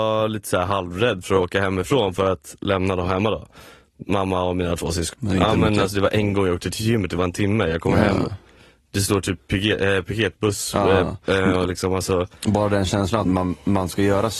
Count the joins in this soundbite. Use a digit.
3